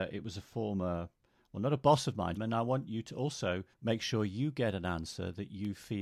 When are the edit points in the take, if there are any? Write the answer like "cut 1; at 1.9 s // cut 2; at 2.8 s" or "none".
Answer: cut 1; at 2.4 s // cut 2; at 3.7 s